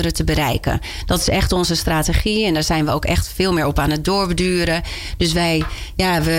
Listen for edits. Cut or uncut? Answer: uncut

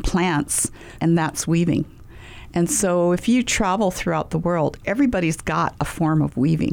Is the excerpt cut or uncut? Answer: cut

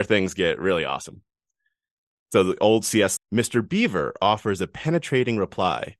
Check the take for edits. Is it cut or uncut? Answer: cut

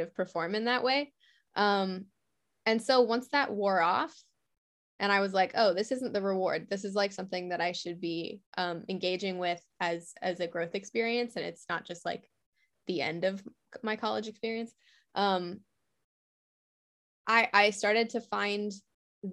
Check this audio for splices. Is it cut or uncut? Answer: cut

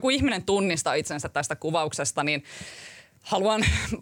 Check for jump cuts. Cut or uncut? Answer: uncut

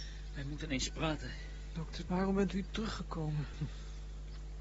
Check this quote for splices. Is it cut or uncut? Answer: cut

